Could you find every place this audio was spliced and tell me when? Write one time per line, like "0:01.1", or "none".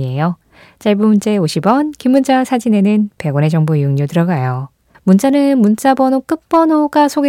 0:04.9